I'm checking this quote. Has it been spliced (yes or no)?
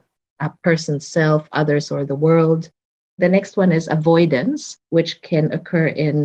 yes